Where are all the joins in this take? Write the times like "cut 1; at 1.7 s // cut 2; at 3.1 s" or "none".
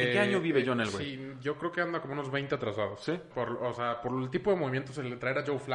cut 1; at 3.3 s